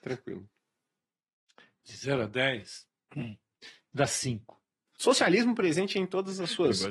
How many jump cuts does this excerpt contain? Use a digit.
1